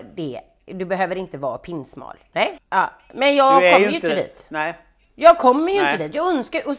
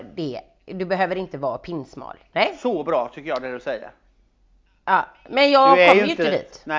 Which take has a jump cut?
first; 1 cut; at 2.6 s

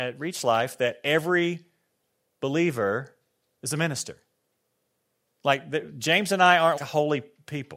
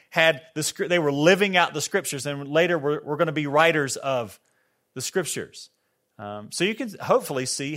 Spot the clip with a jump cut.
first; 1 cut; at 6.8 s

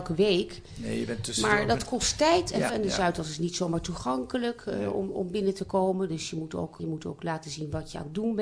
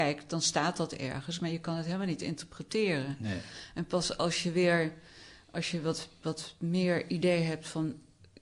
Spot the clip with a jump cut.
first; 2 cuts; at 2.7 s, 6.8 s

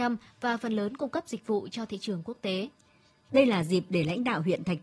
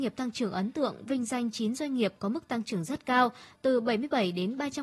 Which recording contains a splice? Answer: first; 1 cut; at 3.3 s

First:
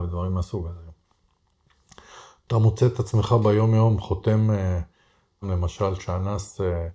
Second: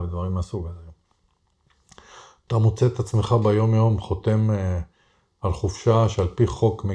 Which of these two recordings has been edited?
first; 1 cut; at 5.4 s

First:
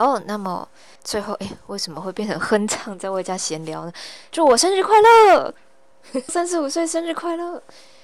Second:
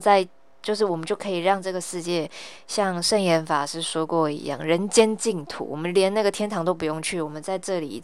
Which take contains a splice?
first; 3 cuts; at 1.0 s, 4.3 s, 6.3 s

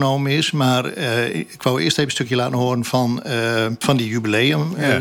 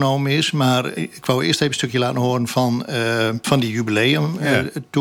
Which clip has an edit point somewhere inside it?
second; 1 cut; at 0.9 s

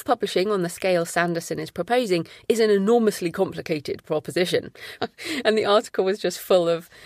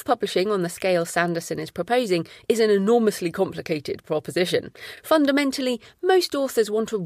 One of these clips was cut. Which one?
first; 1 cut; at 5.0 s

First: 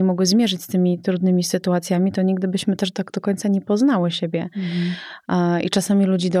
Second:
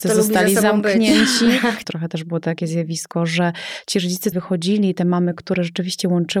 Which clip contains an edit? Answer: second; 2 cuts; at 1.8 s, 4.3 s

